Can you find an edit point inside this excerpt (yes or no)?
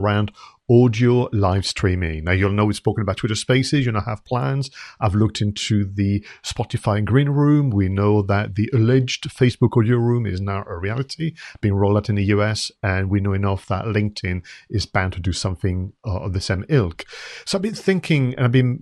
no